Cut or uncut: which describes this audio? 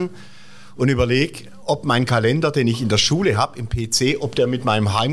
uncut